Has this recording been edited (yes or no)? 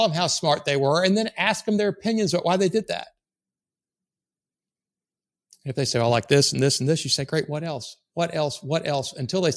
no